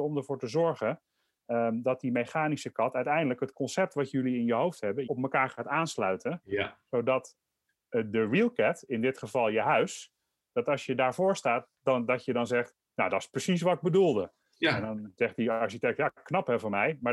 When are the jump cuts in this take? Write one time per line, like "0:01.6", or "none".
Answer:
0:05.1